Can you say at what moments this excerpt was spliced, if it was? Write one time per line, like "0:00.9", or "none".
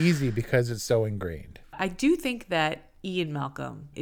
none